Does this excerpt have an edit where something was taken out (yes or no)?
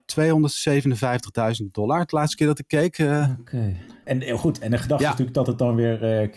yes